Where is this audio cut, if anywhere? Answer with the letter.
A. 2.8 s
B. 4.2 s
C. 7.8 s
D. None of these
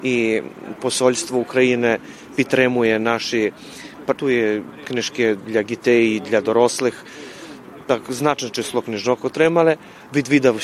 B